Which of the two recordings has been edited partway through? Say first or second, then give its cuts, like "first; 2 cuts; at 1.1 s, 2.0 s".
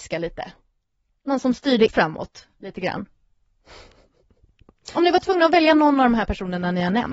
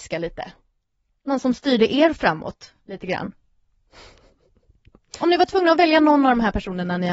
first; 1 cut; at 1.9 s